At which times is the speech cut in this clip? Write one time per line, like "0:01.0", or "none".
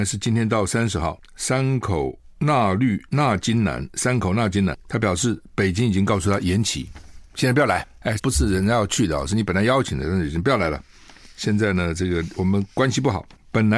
0:08.2